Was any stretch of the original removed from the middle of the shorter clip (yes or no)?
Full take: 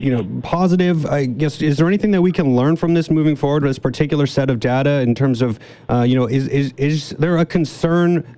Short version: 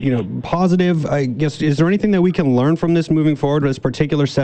no